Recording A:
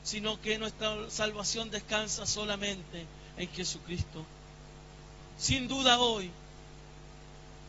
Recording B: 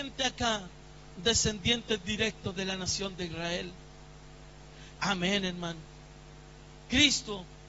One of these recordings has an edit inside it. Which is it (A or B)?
B